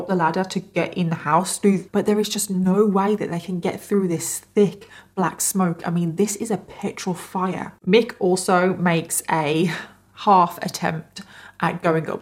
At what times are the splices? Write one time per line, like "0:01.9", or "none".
0:01.9